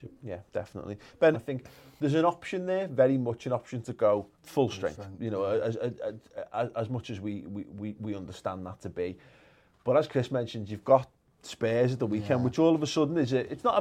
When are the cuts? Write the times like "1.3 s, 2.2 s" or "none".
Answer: 1.3 s, 4.3 s